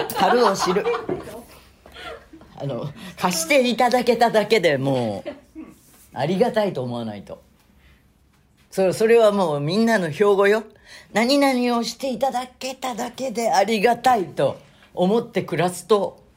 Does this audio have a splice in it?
no; 0 cuts

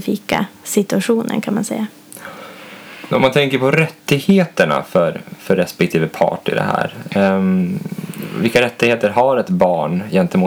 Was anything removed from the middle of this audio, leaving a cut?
no; 0 cuts

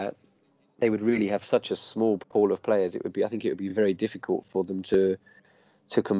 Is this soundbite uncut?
yes; 0 cuts

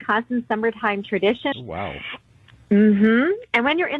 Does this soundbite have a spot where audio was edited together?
yes; 1 cut; at 1.5 s

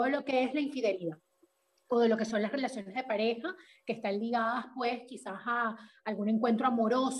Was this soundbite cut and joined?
no; 0 cuts

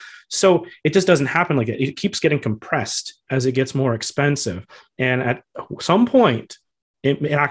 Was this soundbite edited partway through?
no; 0 cuts

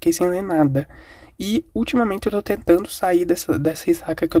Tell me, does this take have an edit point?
no; 0 cuts

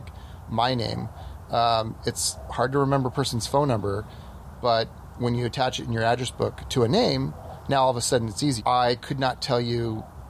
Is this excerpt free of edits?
no; 1 cut; at 8.6 s

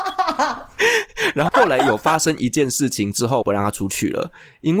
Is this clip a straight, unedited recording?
no; 2 cuts; at 1.5 s, 3.4 s

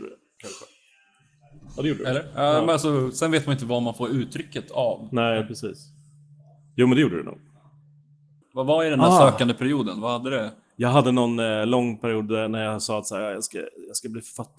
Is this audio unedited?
no; 1 cut; at 8.4 s

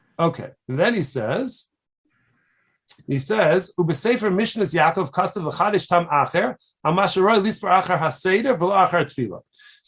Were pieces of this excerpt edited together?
yes; 1 cut; at 3.0 s

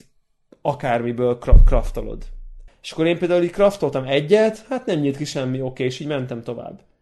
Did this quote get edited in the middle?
yes; 1 cut; at 2.7 s

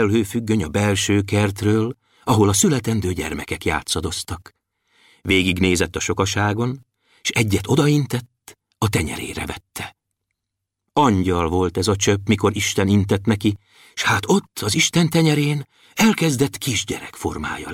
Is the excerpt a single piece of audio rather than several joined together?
yes; 0 cuts

